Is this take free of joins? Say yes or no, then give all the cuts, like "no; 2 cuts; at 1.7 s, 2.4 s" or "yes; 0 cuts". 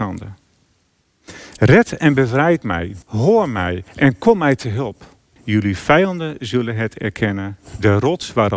no; 2 cuts; at 3.0 s, 5.4 s